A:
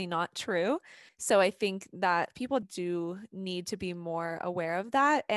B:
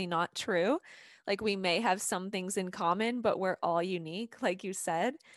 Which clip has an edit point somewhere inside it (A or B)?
A